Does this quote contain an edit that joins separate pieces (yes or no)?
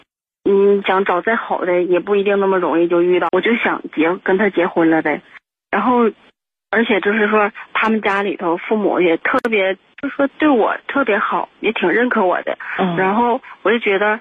yes